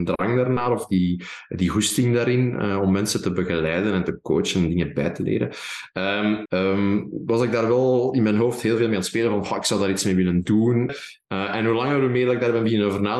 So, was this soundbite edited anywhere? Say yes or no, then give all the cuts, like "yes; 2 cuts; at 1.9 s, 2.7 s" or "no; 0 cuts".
yes; 2 cuts; at 6.5 s, 10.9 s